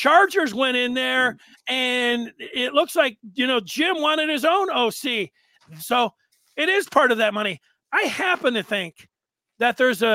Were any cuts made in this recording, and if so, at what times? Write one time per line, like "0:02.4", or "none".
0:05.8